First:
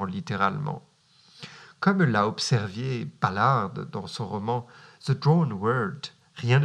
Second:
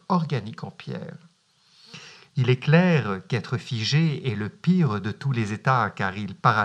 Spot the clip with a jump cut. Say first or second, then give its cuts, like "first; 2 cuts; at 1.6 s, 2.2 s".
second; 1 cut; at 2.3 s